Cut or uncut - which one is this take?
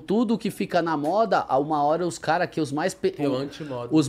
uncut